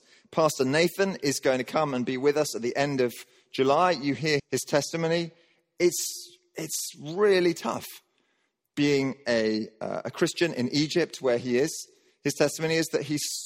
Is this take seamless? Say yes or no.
no